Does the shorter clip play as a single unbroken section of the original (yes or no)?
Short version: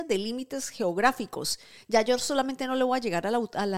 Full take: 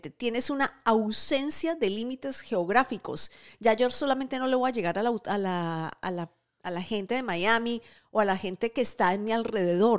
yes